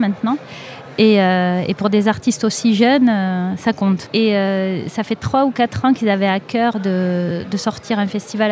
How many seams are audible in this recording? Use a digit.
0